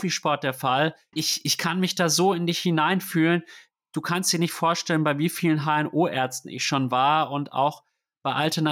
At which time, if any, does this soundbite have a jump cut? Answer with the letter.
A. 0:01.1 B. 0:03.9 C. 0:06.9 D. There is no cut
A